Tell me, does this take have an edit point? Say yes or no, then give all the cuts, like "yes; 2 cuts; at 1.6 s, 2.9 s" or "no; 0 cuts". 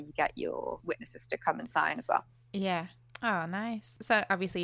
no; 0 cuts